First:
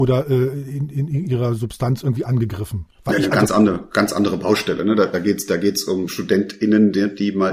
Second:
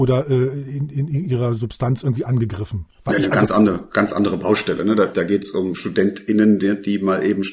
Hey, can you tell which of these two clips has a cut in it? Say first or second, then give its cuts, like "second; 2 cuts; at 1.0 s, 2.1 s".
second; 1 cut; at 5.1 s